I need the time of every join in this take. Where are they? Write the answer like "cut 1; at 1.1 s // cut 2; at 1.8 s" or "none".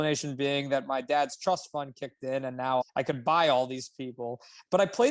cut 1; at 2.8 s